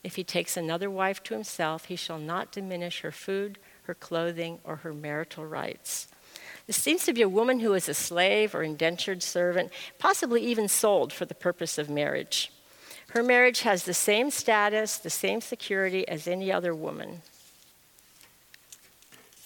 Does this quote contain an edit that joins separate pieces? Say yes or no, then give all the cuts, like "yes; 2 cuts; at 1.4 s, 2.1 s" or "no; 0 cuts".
no; 0 cuts